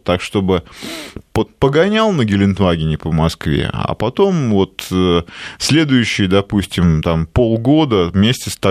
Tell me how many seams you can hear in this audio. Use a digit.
0